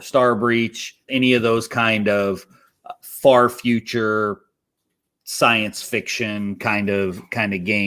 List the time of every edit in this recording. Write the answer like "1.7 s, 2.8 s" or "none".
1.1 s